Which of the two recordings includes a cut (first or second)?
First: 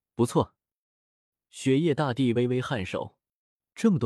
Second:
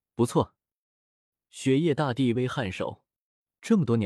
second